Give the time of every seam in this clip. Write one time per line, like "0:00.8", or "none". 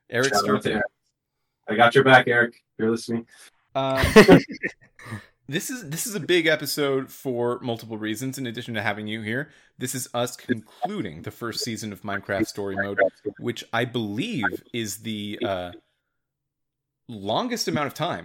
0:03.7